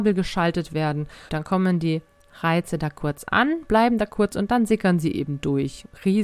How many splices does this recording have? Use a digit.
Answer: 1